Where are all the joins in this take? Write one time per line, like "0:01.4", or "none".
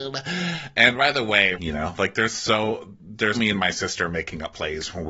0:01.5
0:03.3